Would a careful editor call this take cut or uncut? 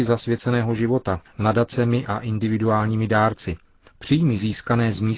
cut